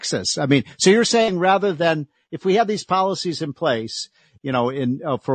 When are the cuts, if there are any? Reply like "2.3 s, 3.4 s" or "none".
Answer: 4.4 s